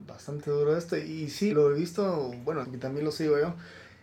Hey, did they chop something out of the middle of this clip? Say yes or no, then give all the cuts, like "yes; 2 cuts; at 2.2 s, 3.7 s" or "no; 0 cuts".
yes; 2 cuts; at 1.5 s, 2.6 s